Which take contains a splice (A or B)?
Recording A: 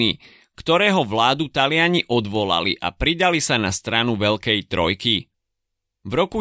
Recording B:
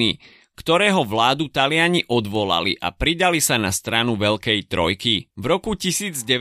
B